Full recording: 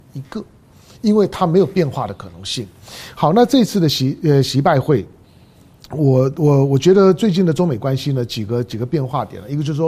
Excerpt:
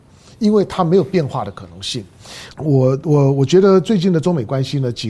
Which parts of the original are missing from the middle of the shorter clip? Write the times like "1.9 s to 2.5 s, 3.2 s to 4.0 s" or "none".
3.1 s to 5.8 s